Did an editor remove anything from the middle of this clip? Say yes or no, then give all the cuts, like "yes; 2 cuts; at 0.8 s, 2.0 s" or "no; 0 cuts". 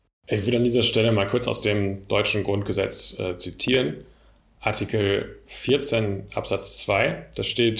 no; 0 cuts